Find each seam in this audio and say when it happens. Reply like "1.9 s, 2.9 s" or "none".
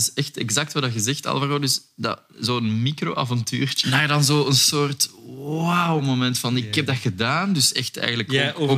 3.8 s